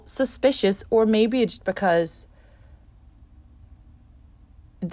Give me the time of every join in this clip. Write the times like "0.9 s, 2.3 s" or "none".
1.6 s